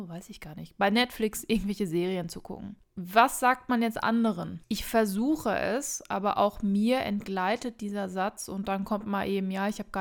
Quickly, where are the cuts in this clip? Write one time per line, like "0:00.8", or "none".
none